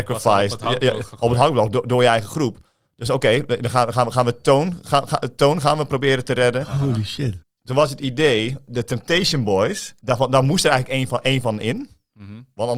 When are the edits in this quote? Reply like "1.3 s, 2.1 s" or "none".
7.4 s